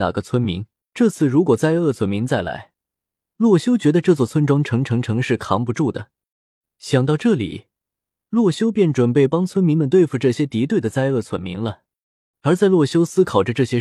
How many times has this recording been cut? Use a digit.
1